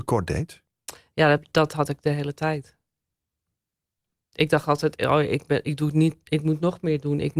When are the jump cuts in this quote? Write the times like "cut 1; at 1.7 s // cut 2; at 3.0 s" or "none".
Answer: none